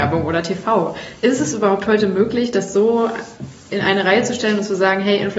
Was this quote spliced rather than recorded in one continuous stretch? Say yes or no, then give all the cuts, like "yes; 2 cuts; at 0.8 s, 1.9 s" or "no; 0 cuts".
no; 0 cuts